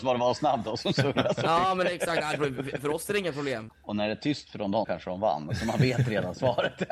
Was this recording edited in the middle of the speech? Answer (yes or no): yes